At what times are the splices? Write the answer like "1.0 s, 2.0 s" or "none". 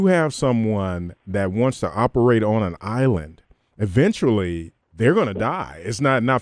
4.8 s